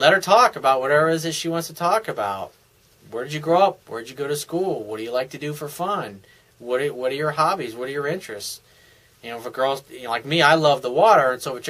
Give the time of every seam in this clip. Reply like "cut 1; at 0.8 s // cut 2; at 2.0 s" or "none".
none